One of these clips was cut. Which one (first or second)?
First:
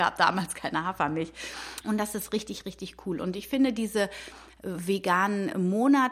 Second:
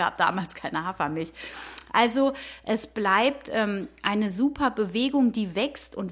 first